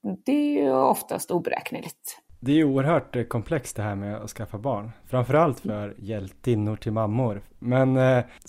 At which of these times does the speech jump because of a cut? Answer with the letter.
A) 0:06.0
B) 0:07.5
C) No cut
A